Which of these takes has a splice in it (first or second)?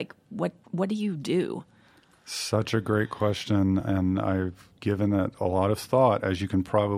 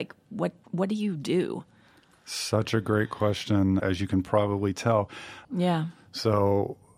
second